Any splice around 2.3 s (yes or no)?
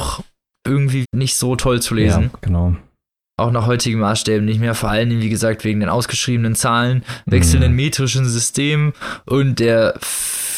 no